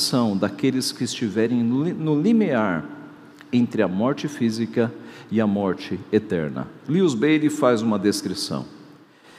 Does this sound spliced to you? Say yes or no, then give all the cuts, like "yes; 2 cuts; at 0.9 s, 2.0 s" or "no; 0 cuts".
no; 0 cuts